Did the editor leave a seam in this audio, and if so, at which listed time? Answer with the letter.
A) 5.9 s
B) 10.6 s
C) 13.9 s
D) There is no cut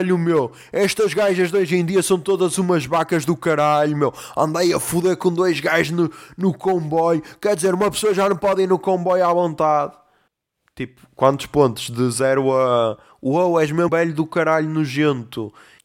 C